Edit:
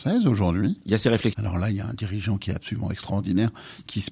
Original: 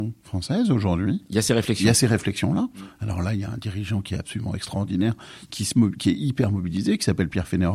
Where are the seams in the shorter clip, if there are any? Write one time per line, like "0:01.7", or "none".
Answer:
0:01.3